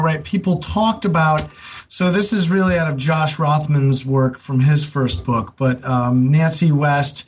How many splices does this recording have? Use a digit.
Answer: 0